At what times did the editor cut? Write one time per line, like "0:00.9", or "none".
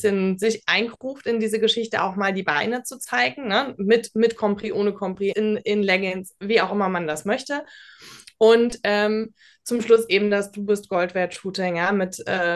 0:05.3